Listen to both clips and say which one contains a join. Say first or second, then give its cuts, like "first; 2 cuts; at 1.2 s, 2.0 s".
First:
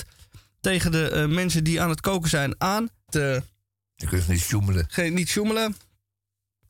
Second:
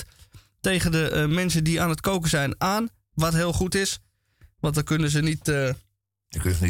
first; 1 cut; at 3.1 s